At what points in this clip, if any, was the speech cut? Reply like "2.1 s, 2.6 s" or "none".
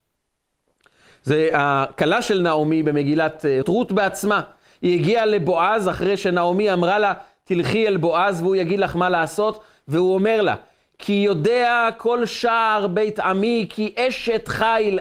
3.6 s